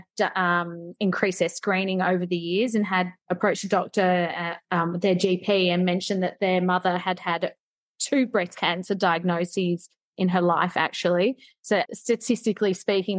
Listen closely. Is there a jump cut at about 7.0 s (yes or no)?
no